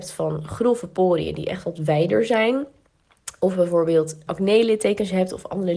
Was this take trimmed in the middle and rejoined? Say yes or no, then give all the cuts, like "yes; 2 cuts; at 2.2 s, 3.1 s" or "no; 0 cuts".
yes; 1 cut; at 4.3 s